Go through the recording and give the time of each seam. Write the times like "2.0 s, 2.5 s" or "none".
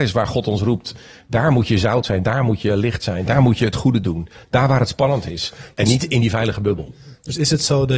none